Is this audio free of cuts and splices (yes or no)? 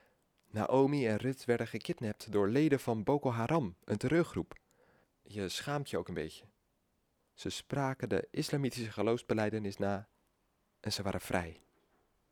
no